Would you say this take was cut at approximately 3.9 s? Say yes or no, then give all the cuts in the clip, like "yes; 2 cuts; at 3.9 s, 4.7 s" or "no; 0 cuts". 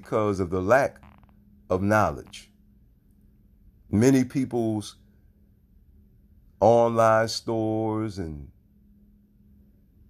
yes; 1 cut; at 3.9 s